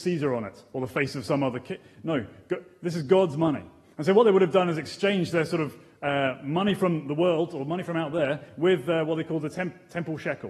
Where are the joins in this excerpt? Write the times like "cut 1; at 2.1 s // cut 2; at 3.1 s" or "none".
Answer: none